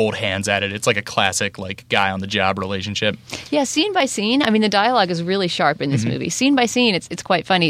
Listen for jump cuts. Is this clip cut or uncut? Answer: uncut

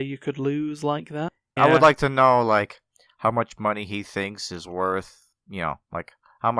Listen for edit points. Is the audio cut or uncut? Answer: cut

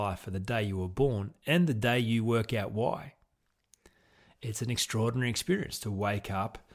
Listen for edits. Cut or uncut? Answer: uncut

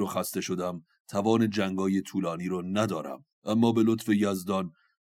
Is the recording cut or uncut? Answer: cut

